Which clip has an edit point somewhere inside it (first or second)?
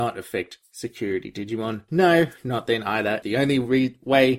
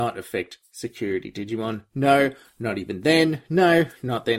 first